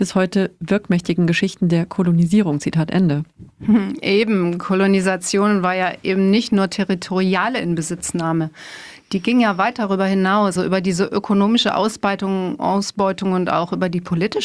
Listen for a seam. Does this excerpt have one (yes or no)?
yes